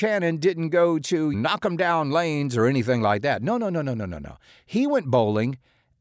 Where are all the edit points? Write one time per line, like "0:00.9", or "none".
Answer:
0:01.3